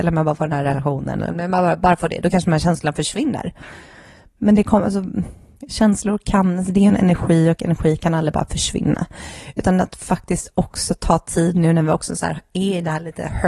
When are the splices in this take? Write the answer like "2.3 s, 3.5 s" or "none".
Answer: none